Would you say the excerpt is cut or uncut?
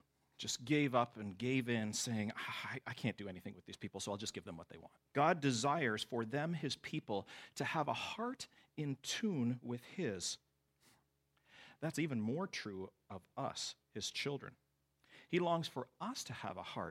cut